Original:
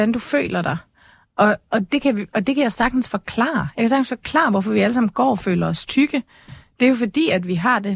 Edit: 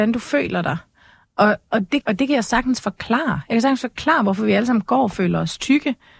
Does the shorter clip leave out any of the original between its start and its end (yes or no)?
yes